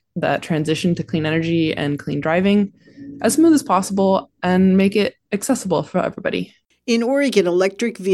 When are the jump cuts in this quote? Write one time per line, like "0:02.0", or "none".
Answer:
none